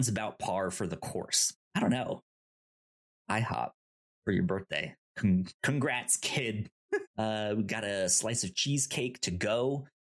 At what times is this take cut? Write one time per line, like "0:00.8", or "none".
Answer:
0:01.6
0:07.1